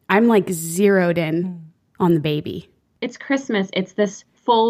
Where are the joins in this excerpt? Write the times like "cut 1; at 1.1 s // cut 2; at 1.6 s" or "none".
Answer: cut 1; at 2.9 s